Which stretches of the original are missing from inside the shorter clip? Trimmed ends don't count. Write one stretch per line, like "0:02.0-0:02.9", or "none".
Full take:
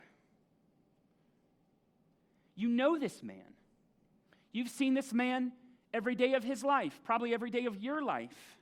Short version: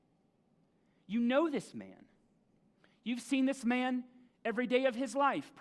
none